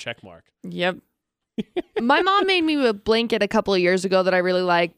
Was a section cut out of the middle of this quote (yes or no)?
no